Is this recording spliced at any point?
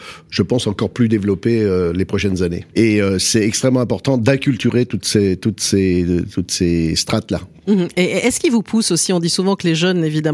yes; 1 cut; at 2.7 s

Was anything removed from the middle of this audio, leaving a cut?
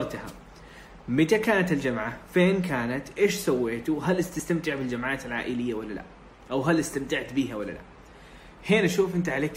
no; 0 cuts

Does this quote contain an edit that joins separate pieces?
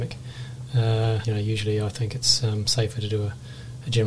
yes; 1 cut; at 1.2 s

